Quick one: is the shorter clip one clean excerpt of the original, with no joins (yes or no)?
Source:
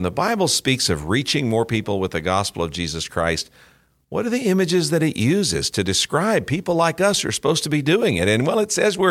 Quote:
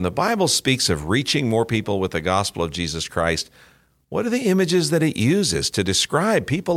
yes